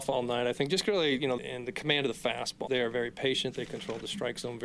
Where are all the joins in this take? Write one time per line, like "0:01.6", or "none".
0:01.4
0:02.7